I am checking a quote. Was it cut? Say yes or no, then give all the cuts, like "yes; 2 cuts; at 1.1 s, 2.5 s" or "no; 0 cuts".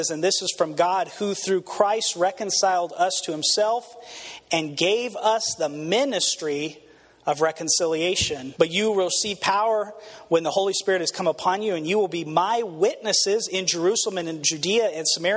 yes; 1 cut; at 8.6 s